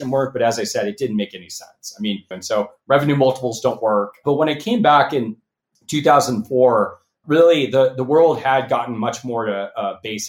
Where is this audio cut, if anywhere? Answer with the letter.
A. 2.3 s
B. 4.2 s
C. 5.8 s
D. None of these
A